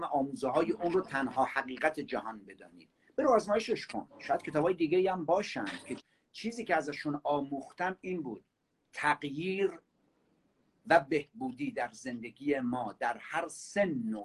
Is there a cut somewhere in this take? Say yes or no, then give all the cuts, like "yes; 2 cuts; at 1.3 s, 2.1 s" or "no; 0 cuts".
no; 0 cuts